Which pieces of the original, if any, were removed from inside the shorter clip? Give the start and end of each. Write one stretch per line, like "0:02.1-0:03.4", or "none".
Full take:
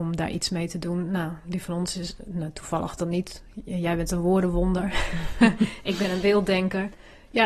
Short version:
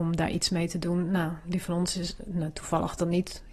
none